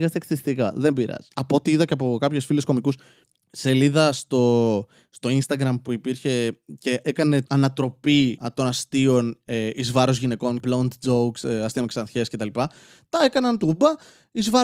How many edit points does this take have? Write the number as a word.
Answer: one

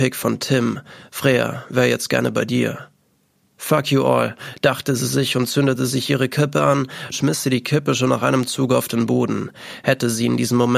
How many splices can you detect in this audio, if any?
one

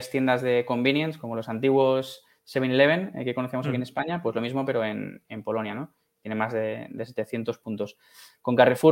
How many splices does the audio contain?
zero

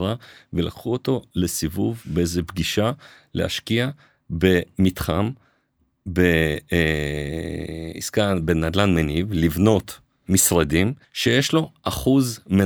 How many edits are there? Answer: one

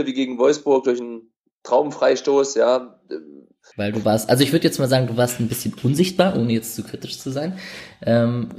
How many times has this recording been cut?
one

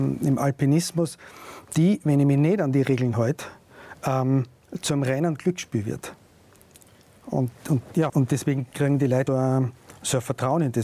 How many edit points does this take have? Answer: two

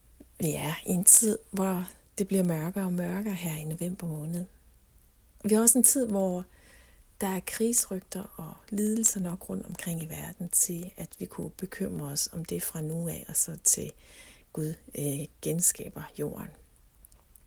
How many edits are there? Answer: zero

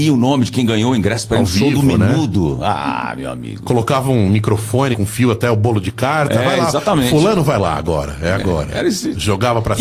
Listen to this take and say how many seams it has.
one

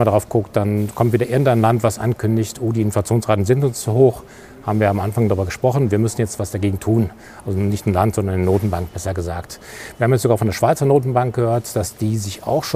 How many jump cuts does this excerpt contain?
zero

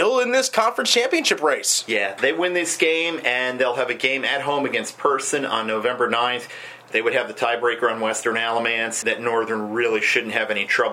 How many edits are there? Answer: two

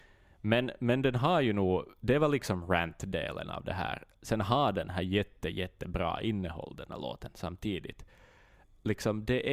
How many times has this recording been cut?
zero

